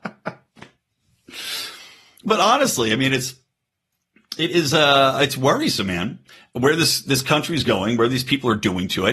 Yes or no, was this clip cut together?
no